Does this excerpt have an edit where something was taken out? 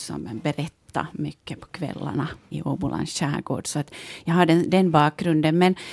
yes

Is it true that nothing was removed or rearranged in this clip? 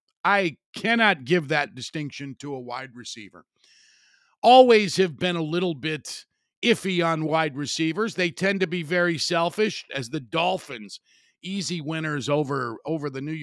no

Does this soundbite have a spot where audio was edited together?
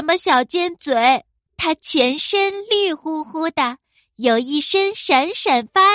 yes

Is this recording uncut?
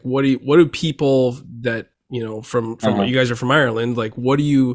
yes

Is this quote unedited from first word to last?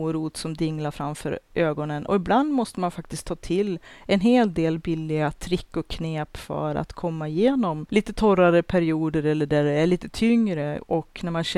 yes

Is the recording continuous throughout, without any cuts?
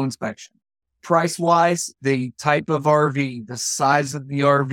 no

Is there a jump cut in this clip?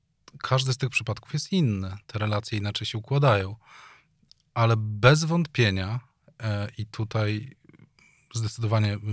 no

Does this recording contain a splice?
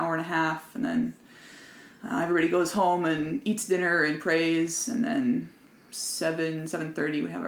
no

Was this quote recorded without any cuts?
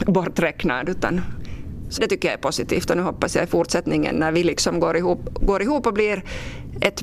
no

